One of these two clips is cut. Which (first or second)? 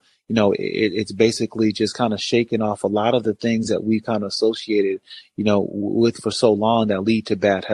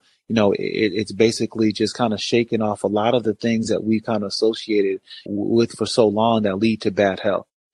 second